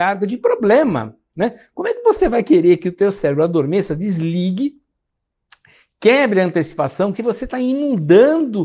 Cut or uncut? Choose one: cut